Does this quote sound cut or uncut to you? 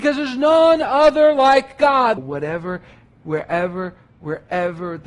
cut